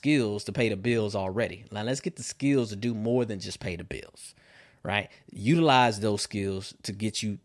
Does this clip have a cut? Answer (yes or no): no